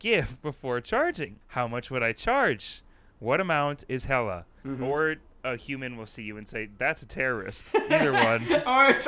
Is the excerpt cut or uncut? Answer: cut